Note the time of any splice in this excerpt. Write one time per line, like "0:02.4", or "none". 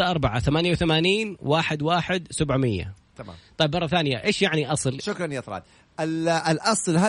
0:05.0